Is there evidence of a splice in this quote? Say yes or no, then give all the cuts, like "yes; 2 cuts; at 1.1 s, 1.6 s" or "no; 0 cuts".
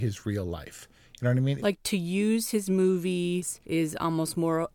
yes; 1 cut; at 1.6 s